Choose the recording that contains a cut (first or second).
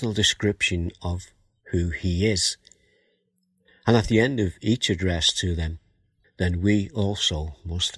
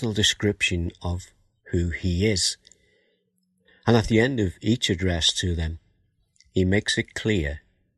first